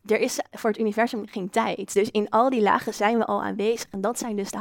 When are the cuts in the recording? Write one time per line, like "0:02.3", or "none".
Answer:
none

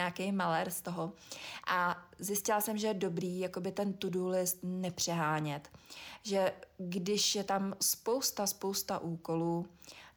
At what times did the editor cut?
none

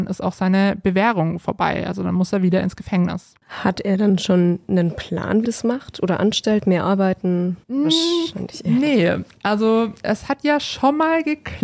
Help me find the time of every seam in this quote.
0:05.4
0:07.6

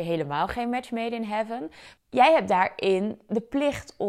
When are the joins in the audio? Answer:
0:02.0

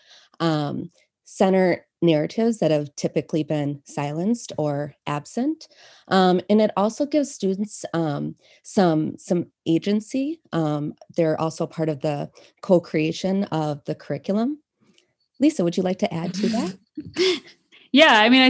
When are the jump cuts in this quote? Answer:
none

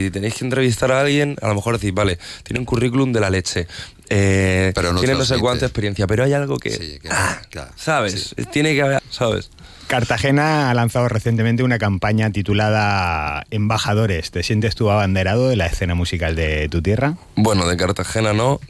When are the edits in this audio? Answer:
0:09.0

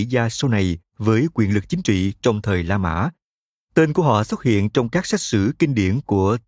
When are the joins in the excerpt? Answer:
none

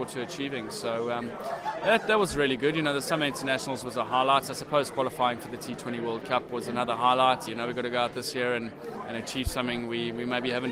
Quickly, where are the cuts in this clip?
0:07.5

